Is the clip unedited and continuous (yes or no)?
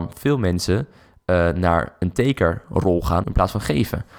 no